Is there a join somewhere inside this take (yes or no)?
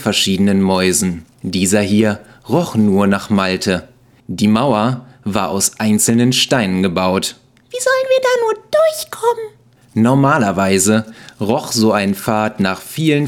yes